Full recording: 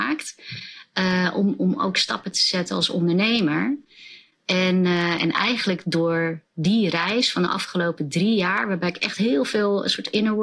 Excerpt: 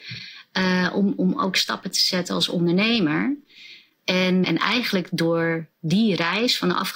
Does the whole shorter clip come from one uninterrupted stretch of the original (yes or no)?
no